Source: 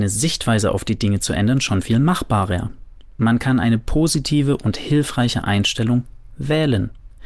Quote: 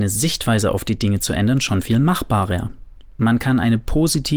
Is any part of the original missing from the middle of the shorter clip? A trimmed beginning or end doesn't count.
no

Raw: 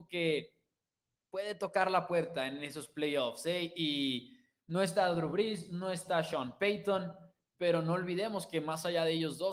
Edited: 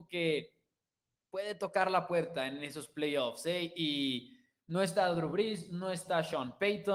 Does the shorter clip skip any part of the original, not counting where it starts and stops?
no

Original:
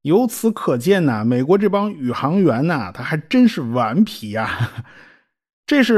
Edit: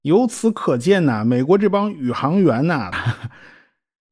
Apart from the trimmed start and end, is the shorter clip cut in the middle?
yes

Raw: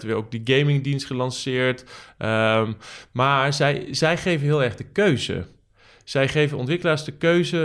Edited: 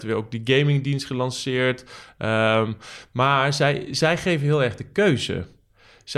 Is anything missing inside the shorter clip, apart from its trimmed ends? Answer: no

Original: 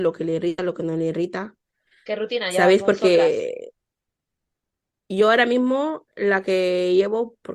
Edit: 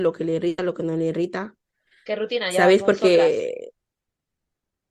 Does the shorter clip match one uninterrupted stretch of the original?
yes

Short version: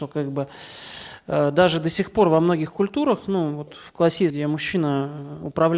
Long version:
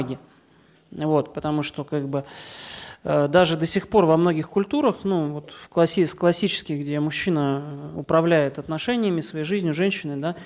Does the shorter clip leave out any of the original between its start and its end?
yes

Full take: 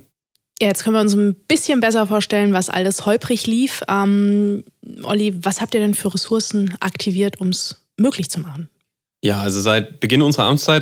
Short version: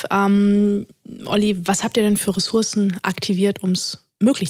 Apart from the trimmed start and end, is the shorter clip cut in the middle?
no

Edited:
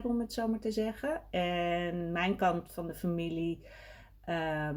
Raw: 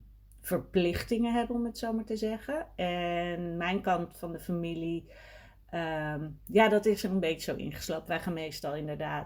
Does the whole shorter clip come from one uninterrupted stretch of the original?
yes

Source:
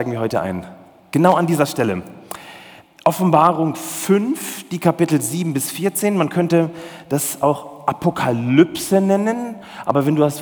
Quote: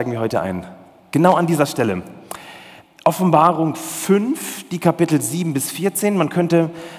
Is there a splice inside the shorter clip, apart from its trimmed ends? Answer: no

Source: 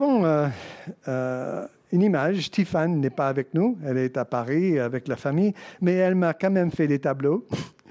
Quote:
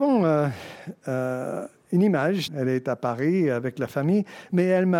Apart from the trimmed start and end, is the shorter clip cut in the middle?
yes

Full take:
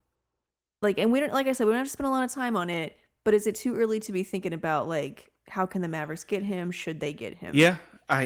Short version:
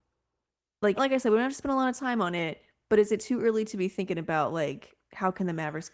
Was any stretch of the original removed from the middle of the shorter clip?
yes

